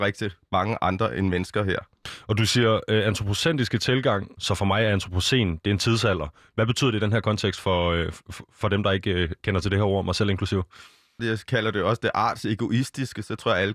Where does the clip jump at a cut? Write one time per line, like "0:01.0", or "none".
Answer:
0:04.4
0:11.2